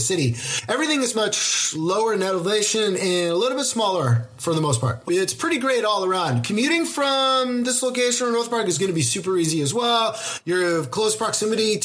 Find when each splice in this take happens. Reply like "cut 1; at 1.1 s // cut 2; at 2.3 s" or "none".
cut 1; at 1.1 s // cut 2; at 5.1 s